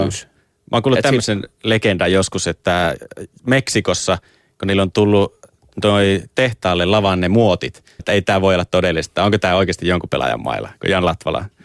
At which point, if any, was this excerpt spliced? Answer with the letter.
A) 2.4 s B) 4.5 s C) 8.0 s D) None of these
C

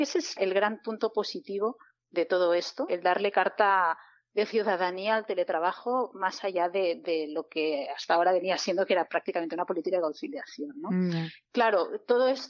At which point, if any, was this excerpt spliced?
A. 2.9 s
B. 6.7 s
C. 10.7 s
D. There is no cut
A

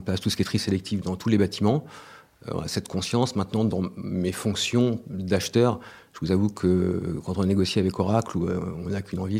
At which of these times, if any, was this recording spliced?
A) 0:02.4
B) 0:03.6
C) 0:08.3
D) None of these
D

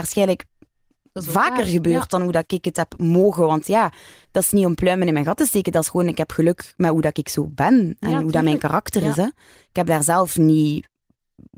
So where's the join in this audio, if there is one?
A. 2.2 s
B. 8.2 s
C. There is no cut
C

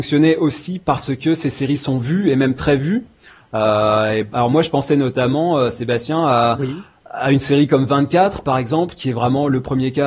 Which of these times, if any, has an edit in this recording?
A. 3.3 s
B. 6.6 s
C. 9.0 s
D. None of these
D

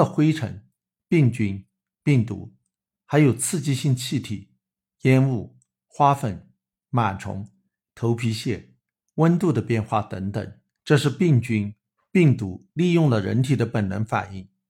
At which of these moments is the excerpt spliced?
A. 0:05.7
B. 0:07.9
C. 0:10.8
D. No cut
C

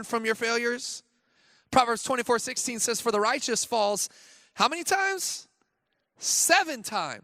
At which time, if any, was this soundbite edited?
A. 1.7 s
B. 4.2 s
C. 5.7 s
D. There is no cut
D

